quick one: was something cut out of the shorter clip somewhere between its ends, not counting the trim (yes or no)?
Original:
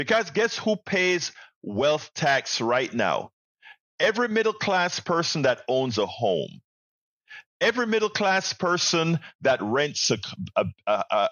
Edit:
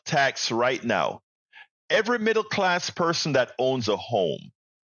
no